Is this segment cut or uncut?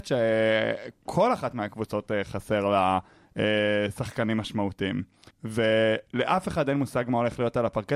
cut